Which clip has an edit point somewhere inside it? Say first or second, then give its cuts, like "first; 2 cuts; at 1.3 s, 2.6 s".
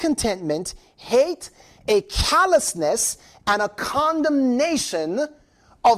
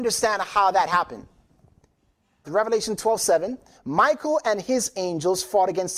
second; 2 cuts; at 2.4 s, 3.7 s